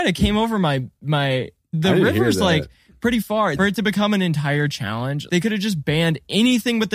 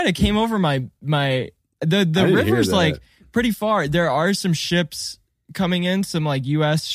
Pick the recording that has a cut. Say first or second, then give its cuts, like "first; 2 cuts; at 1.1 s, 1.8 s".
first; 3 cuts; at 1.7 s, 3.6 s, 5.3 s